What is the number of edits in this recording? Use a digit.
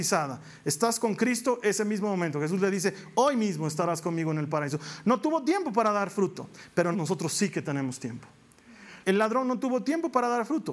2